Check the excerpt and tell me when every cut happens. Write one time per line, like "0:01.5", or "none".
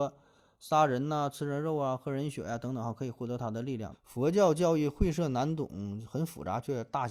0:03.9